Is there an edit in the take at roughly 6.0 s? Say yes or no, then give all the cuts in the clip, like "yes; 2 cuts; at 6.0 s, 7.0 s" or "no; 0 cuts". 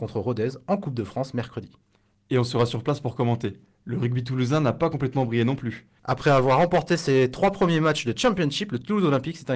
yes; 1 cut; at 6.0 s